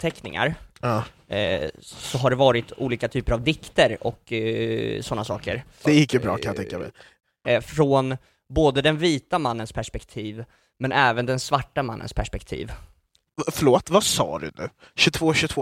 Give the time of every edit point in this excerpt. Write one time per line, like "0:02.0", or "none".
0:05.8
0:07.4